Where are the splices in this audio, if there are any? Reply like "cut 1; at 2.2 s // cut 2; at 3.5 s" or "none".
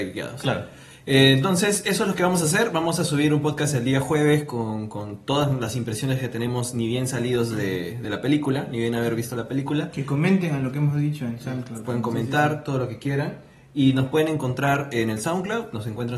none